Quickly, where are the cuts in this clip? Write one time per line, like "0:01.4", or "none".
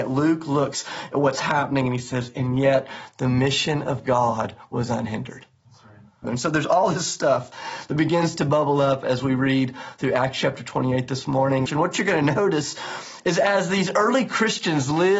0:06.2
0:11.7